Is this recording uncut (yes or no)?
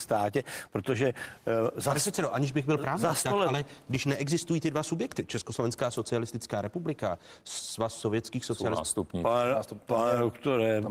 yes